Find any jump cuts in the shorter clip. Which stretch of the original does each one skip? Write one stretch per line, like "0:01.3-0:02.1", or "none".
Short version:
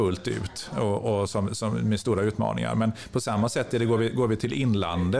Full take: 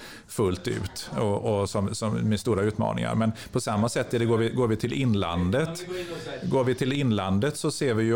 none

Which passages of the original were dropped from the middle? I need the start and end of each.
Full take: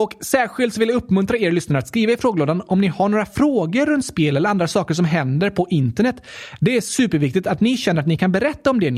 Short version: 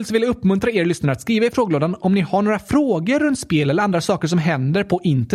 none

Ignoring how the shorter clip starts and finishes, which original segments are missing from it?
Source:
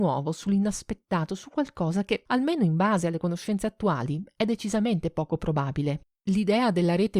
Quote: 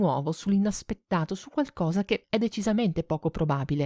0:02.2-0:04.3

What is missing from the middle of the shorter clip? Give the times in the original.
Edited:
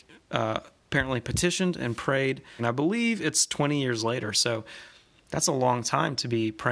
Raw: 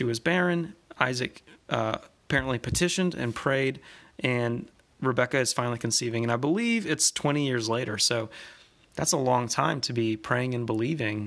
0:04.0-0:06.2

